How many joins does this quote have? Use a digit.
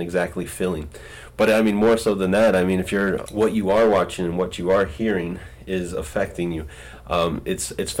1